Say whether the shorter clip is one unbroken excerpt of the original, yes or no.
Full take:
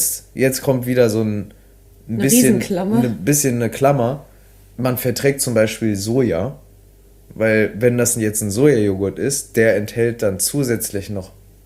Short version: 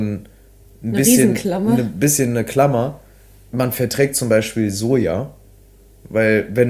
yes